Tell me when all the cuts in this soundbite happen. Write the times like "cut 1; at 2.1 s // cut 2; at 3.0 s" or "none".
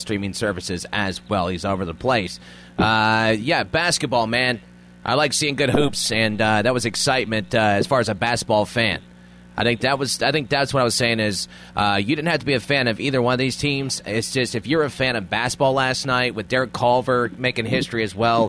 none